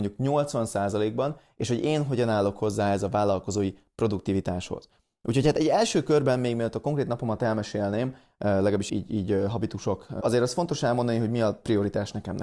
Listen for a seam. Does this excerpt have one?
yes; 2 cuts; at 8.9 s, 10.2 s

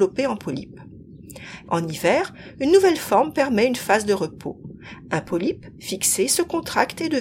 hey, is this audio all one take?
no; 1 cut; at 1.6 s

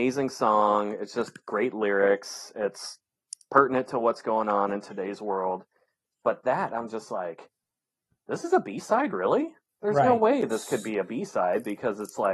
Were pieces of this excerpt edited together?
no; 0 cuts

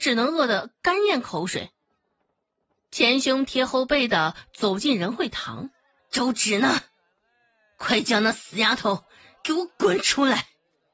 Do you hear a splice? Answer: yes; 1 cut; at 6.0 s

